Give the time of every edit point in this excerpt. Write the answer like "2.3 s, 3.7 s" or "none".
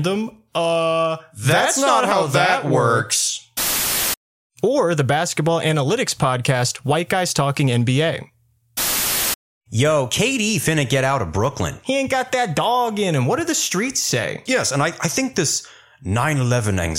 14.5 s